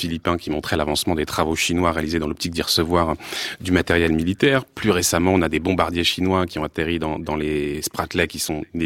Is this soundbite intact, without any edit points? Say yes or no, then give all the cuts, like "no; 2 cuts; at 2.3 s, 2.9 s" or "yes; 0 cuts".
yes; 0 cuts